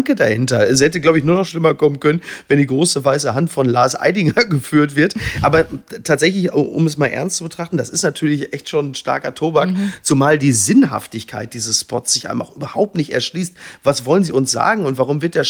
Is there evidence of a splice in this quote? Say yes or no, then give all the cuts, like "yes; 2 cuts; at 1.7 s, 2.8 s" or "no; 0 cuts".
no; 0 cuts